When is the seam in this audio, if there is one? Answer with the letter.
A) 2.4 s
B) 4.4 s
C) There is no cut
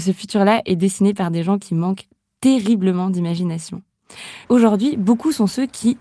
B